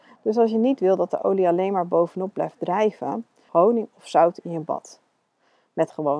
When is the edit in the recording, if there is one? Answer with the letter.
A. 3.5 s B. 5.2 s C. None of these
A